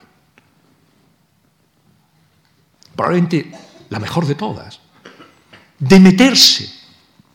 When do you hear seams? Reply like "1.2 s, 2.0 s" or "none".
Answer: none